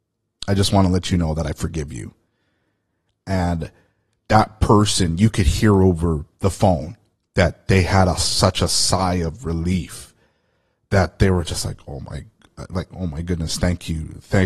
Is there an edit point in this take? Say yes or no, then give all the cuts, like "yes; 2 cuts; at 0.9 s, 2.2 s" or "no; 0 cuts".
no; 0 cuts